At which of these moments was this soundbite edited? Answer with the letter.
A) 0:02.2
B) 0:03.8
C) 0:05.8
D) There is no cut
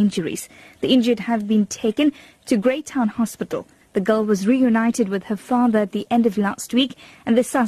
B